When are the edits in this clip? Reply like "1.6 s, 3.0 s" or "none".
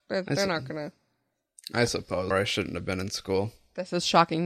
2.3 s